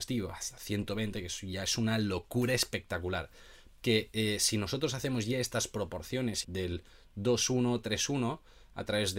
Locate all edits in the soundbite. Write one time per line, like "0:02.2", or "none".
0:03.8
0:06.4